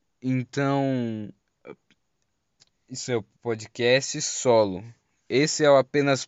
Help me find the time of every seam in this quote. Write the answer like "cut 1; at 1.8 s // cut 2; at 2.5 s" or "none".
cut 1; at 3.3 s